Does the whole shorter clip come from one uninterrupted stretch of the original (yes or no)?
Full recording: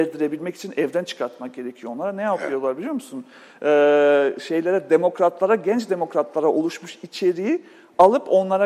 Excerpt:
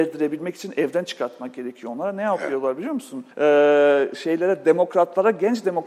no